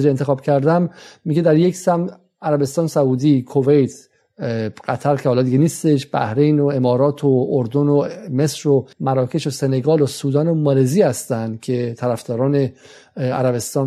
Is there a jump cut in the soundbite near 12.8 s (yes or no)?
no